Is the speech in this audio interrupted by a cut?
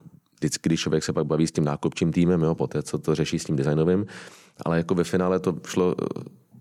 no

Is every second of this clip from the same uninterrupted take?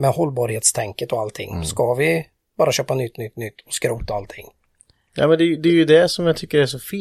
yes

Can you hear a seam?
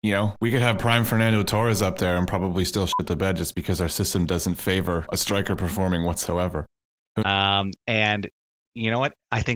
yes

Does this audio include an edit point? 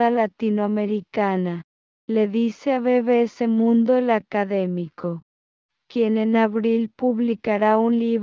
no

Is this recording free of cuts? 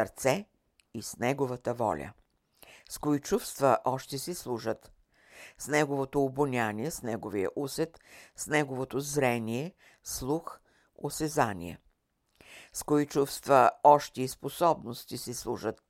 yes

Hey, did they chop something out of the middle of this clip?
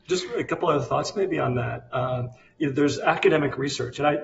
no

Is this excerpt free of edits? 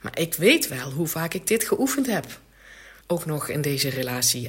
no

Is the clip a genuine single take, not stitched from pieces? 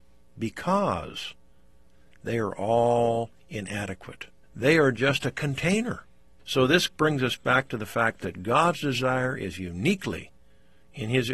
no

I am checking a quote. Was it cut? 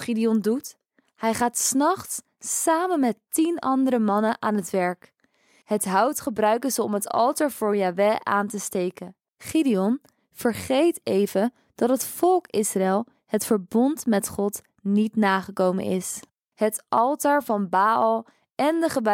yes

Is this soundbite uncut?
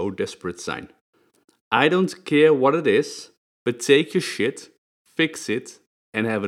yes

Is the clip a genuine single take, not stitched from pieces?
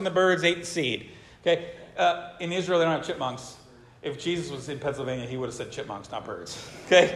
yes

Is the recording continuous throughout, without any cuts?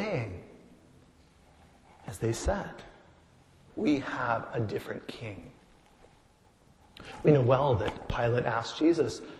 no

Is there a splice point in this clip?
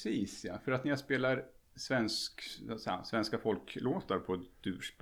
no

